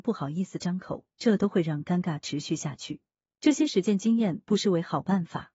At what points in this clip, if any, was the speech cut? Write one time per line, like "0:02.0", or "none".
0:03.3